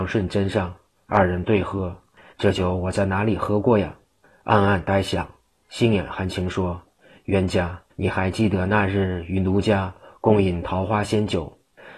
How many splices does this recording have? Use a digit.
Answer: 3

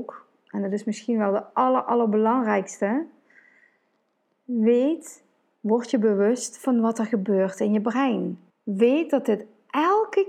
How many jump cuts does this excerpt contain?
1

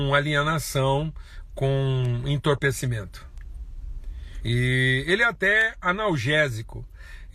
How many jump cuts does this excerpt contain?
2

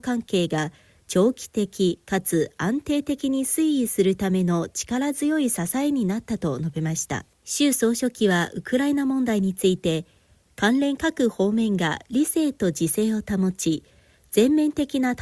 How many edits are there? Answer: 1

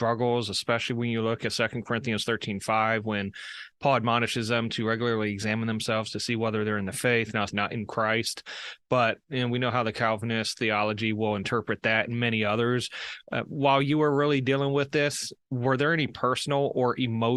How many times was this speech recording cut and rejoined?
1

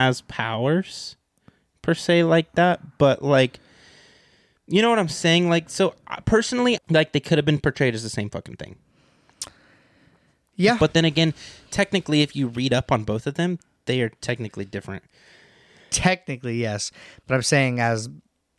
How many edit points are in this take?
1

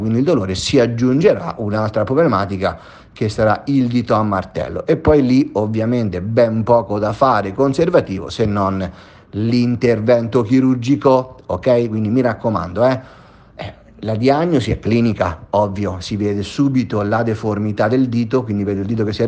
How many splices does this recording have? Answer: 0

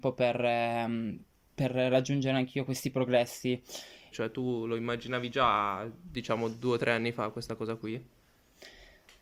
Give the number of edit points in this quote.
1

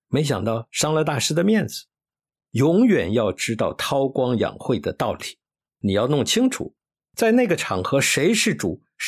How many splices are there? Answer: 2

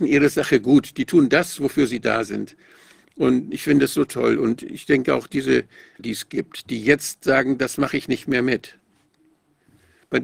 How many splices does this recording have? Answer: 1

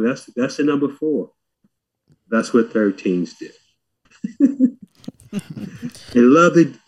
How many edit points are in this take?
2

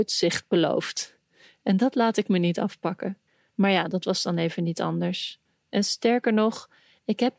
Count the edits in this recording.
1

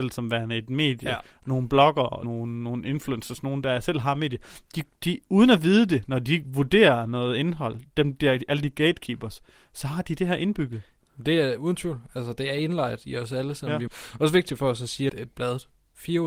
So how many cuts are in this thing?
3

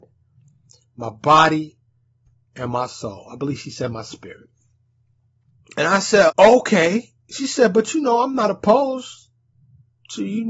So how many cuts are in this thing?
1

